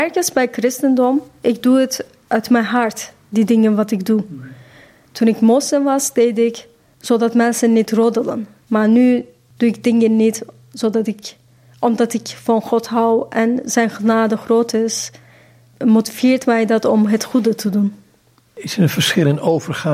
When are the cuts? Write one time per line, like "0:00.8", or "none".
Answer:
0:08.6